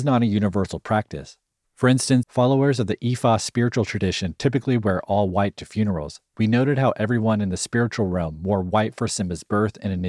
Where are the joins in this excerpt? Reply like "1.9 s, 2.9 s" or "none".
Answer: 2.2 s, 6.3 s